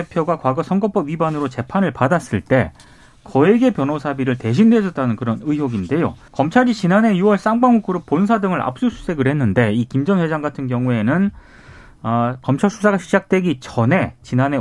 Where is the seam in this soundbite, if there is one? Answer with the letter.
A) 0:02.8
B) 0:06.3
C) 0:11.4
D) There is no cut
B